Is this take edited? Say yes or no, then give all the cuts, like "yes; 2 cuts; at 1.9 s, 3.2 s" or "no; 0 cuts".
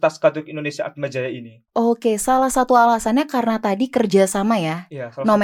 yes; 1 cut; at 1.7 s